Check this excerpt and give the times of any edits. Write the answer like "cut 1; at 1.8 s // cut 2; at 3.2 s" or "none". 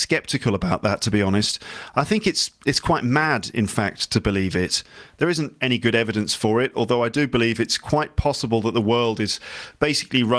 none

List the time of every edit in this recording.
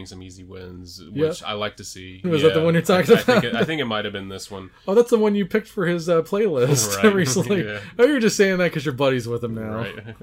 cut 1; at 2.2 s

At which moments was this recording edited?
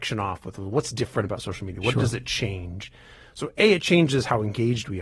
none

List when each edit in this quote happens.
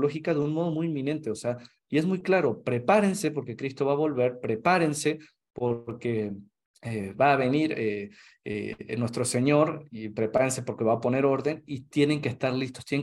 none

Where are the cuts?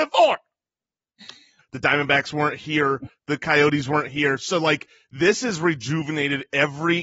cut 1; at 1.6 s

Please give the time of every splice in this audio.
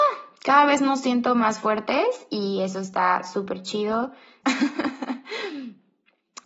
cut 1; at 4.4 s

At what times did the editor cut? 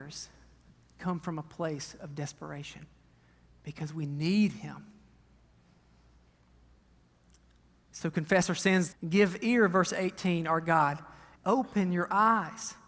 cut 1; at 8.9 s // cut 2; at 11.4 s

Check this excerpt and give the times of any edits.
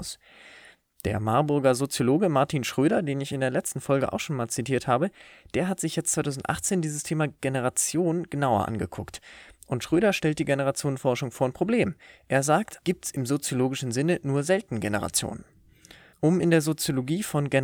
cut 1; at 12.8 s // cut 2; at 16.1 s

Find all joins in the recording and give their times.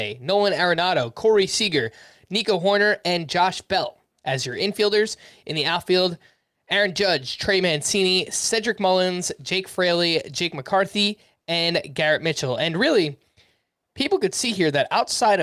none

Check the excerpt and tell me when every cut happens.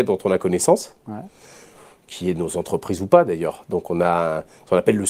none

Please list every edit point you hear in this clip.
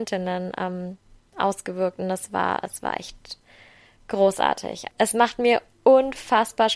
cut 1; at 4.9 s

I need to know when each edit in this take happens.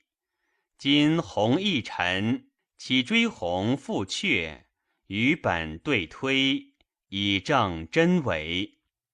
cut 1; at 2.6 s

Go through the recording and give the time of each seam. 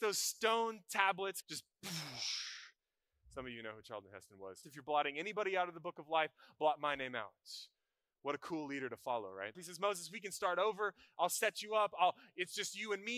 cut 1; at 1.4 s // cut 2; at 4.6 s // cut 3; at 9.5 s

